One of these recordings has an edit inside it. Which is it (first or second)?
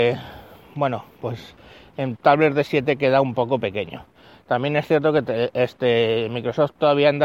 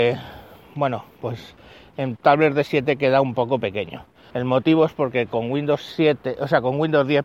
second